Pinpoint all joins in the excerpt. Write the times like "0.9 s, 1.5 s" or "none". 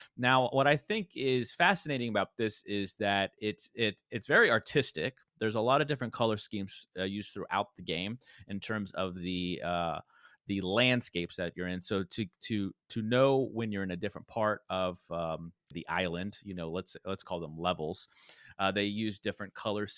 15.7 s, 17.2 s